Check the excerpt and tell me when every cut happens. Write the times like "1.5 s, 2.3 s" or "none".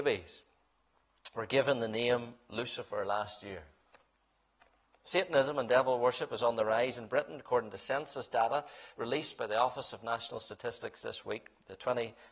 5.0 s